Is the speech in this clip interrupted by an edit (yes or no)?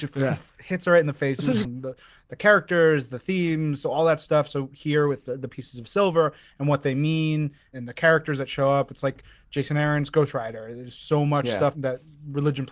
yes